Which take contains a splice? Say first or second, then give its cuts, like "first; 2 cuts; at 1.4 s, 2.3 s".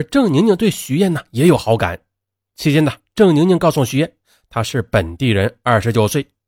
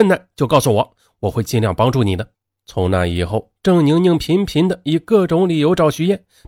second; 1 cut; at 2.5 s